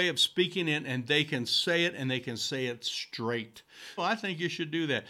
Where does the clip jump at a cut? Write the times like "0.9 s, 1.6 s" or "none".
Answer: 4.0 s